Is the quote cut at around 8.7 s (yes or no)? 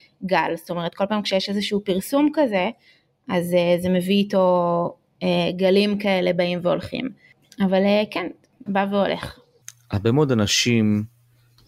yes